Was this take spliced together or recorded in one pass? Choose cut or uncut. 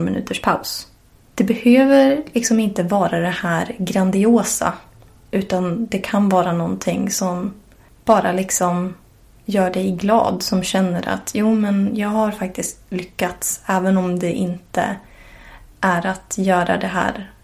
uncut